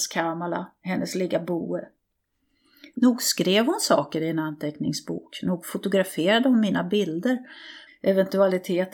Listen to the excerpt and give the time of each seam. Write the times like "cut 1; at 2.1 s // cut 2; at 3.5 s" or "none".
cut 1; at 2.9 s // cut 2; at 7.9 s